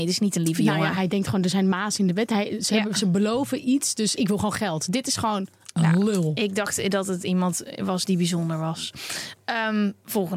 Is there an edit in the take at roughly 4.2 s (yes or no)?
yes